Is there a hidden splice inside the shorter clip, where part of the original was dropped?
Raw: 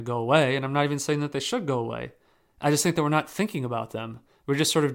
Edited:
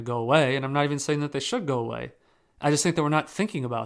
no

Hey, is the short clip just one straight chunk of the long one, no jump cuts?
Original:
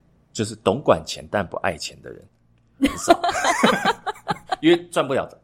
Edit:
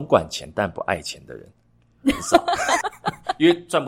no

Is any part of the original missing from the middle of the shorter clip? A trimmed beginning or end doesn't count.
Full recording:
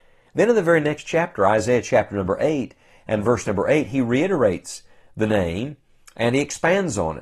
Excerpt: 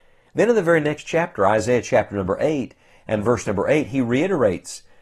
no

